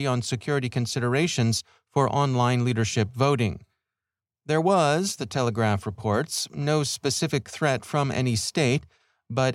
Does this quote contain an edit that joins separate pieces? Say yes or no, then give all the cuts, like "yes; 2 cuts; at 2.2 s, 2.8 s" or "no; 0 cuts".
no; 0 cuts